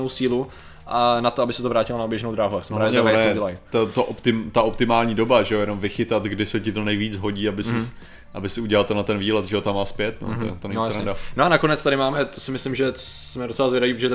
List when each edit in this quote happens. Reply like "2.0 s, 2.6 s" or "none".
none